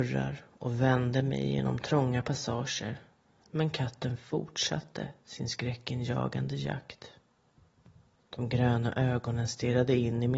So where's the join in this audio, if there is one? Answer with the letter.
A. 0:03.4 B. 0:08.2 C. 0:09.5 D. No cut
B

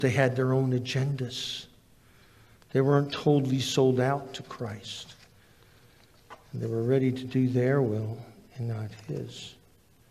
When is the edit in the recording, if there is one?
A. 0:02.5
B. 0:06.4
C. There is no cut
C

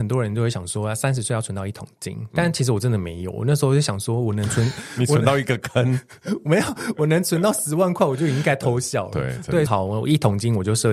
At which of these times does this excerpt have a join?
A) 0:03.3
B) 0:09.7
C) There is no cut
B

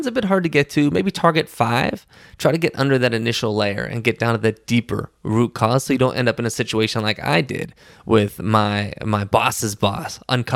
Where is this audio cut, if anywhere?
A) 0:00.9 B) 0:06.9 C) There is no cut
A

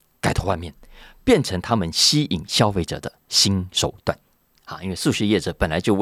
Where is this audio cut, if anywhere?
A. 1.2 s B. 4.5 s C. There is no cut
B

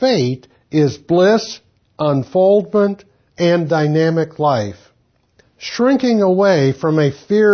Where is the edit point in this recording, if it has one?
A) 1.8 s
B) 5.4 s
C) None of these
B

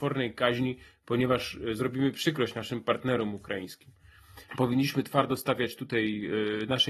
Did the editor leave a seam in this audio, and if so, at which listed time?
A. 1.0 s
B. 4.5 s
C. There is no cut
B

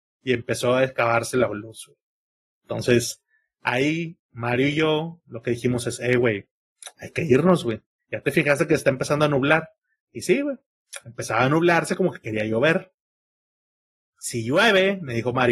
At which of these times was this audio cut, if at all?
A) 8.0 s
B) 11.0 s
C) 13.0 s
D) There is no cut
A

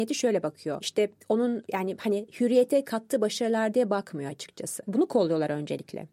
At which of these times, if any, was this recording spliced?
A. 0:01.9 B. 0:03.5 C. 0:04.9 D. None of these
C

